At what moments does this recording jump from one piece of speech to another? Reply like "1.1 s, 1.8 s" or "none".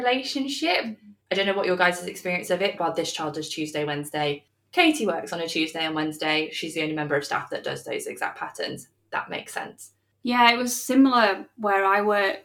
2.8 s